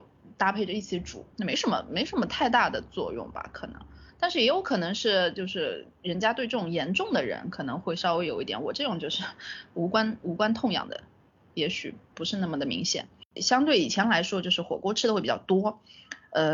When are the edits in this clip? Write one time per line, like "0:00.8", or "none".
0:01.3
0:13.4